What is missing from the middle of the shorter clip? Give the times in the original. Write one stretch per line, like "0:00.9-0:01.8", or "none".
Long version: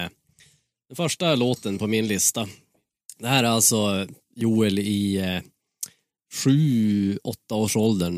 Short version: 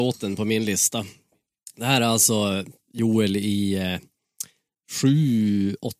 none